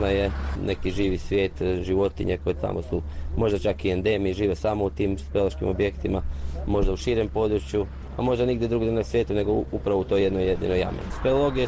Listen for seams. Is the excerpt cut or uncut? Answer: uncut